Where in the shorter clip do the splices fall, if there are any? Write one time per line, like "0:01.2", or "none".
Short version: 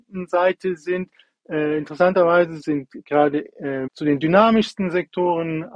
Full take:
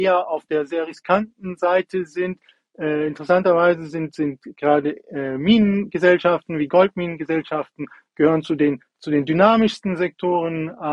0:02.6
0:03.9